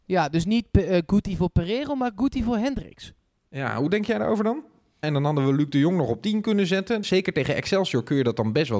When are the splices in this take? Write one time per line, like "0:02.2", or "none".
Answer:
0:05.0
0:07.0